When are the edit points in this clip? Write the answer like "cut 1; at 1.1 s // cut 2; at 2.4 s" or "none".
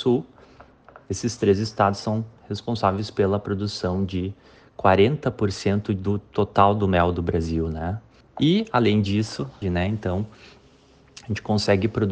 cut 1; at 8.2 s // cut 2; at 9.6 s